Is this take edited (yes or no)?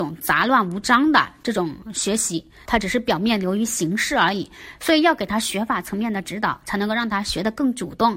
yes